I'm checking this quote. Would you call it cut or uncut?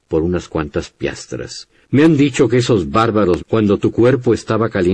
cut